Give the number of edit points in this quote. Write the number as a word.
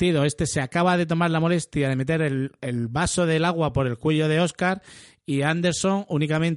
one